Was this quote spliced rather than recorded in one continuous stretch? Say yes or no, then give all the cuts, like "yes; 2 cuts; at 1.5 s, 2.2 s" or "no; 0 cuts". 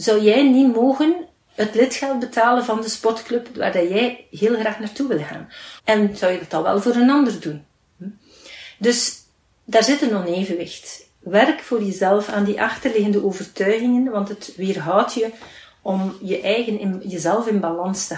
yes; 1 cut; at 5.8 s